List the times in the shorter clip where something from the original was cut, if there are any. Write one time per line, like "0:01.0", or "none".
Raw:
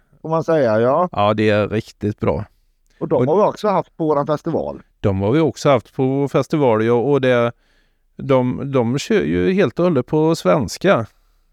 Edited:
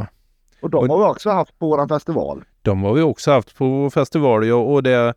none